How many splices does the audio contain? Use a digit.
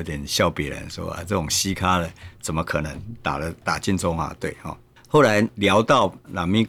0